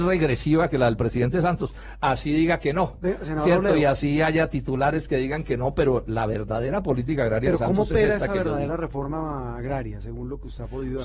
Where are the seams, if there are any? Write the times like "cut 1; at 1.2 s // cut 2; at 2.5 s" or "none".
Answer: none